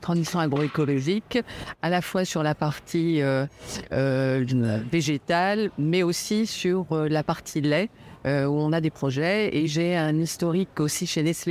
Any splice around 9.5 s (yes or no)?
no